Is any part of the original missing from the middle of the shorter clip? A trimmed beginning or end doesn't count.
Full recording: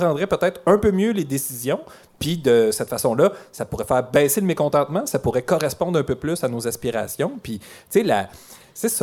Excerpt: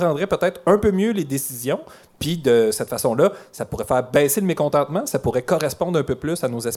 no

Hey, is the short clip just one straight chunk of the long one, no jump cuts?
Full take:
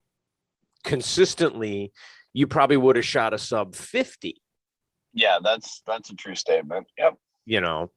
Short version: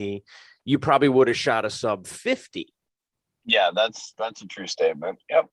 yes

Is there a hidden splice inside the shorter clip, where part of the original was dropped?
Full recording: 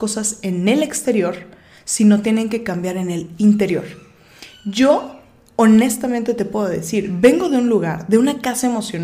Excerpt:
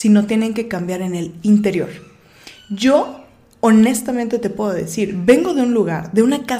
no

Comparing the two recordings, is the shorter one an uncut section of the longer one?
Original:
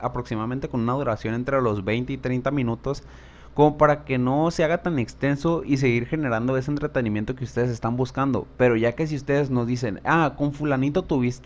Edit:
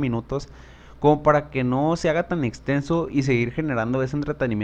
yes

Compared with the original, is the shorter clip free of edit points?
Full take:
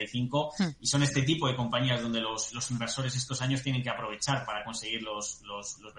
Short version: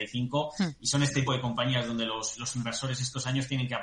no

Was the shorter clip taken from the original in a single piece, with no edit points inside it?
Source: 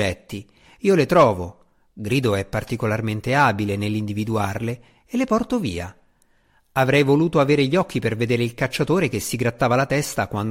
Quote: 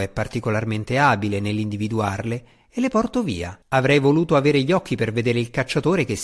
no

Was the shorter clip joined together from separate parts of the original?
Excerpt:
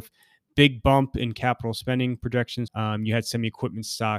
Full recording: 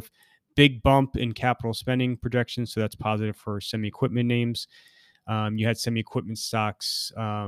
yes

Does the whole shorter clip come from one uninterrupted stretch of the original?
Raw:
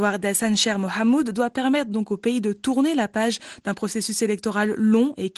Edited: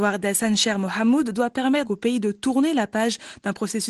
no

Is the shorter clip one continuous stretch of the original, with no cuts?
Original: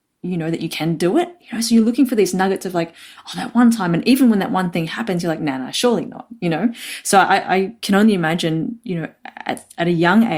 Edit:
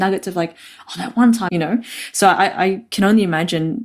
no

